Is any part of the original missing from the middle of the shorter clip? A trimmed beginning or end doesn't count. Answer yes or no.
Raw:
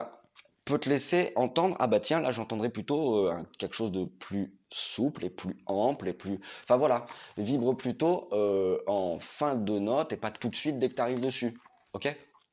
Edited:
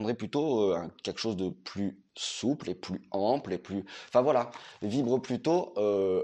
no